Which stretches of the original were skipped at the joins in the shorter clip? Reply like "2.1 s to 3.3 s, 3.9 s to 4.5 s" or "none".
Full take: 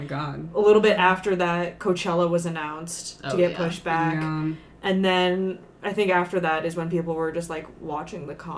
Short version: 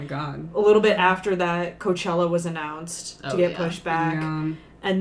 none